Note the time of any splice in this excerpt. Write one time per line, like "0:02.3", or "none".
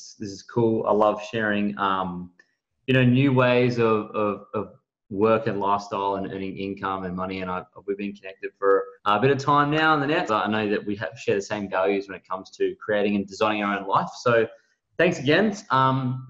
0:09.0
0:10.3